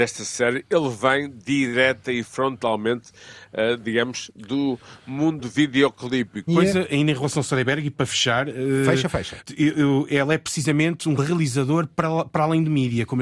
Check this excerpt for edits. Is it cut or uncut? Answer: cut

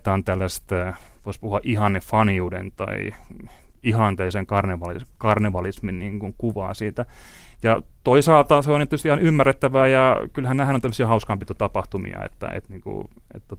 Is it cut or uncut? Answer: uncut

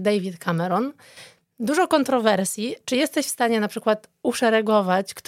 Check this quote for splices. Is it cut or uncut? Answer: uncut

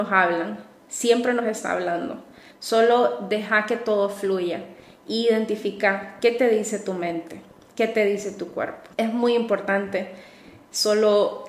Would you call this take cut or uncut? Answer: cut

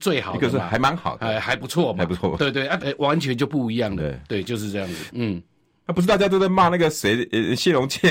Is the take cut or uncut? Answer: cut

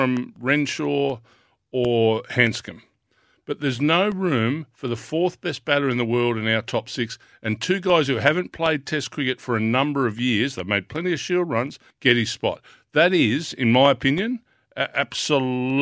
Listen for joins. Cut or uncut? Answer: cut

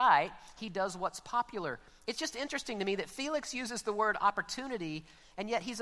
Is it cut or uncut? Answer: uncut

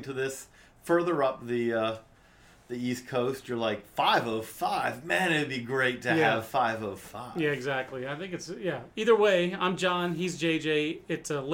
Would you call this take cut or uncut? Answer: uncut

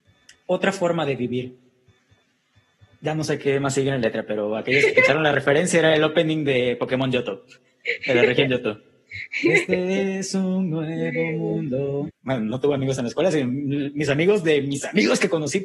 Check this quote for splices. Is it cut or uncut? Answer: cut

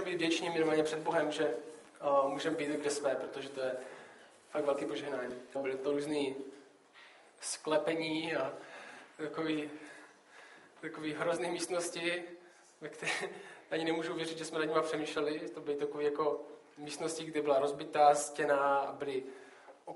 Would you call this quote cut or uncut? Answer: cut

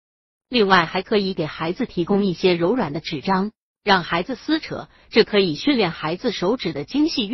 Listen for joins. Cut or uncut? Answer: uncut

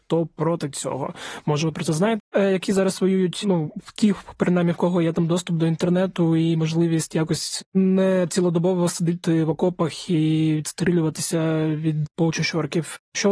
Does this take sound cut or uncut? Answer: cut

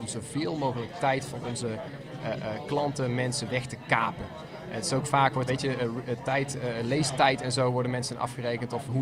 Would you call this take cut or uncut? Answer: cut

